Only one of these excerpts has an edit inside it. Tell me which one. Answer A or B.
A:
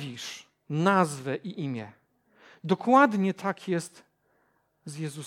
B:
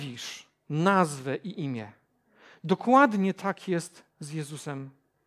B